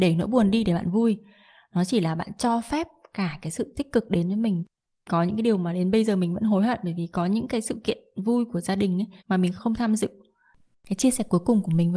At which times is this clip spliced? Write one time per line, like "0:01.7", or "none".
0:09.2